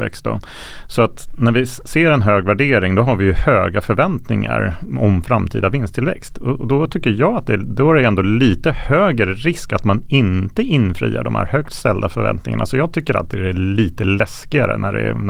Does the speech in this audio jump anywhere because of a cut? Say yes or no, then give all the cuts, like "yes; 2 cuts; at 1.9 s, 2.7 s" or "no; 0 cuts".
no; 0 cuts